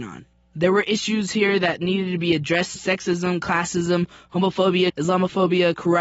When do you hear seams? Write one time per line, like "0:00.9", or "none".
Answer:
0:02.8
0:04.9

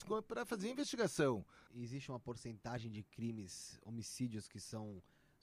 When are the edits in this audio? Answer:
0:01.7

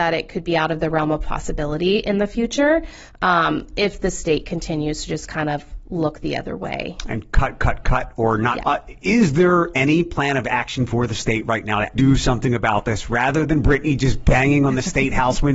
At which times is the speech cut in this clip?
0:08.6
0:12.0

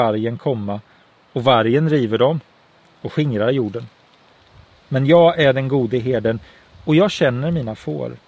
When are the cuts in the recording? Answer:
0:04.8

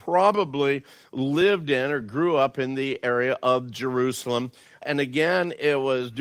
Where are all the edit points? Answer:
none

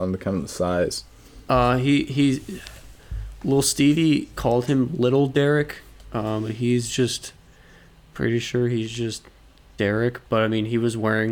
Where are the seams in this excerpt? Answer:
none

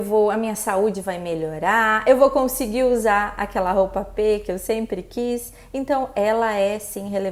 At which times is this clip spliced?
none

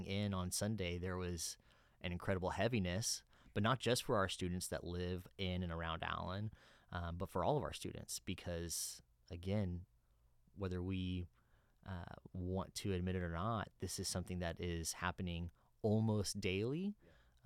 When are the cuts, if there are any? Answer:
none

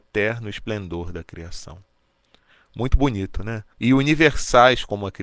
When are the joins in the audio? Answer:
0:03.7

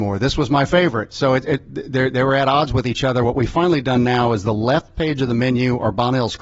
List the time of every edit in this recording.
none

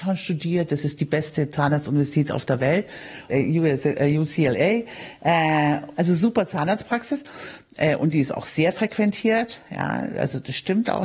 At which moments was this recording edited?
0:03.3
0:05.9

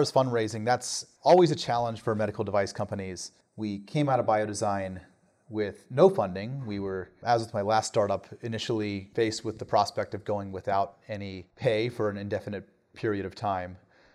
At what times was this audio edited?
none

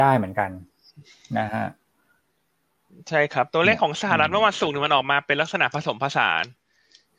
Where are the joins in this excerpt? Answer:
none

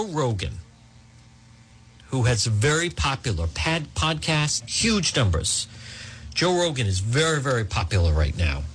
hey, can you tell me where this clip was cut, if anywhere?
0:04.6

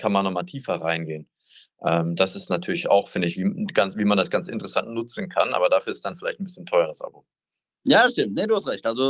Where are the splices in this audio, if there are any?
none

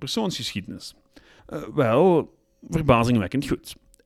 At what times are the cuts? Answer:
0:01.4

